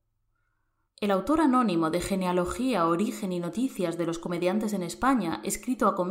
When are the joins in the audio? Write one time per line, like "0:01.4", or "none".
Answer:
none